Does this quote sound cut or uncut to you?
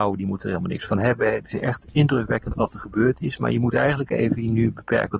cut